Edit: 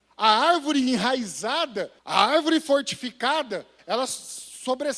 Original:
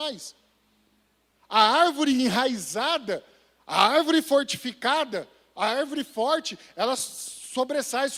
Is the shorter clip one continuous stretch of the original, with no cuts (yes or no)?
no